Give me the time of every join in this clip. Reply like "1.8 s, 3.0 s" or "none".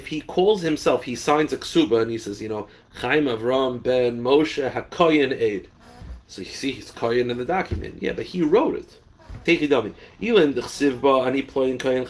9.5 s